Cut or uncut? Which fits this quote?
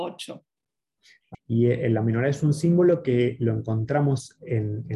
cut